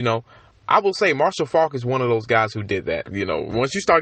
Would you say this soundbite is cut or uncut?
cut